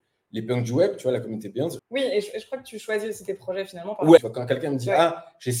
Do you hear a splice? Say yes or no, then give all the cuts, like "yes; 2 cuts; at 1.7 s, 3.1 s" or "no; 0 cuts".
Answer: yes; 2 cuts; at 1.8 s, 4.2 s